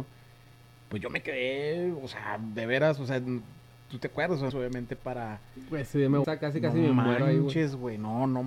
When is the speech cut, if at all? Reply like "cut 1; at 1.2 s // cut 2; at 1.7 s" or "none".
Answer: cut 1; at 4.5 s // cut 2; at 6.2 s

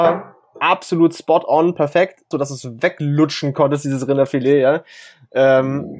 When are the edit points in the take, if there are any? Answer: cut 1; at 2.3 s

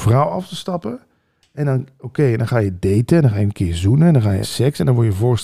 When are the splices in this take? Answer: cut 1; at 4.4 s

